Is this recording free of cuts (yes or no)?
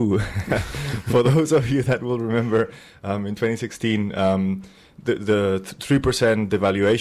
yes